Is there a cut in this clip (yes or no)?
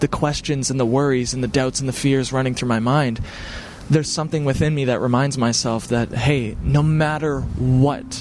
no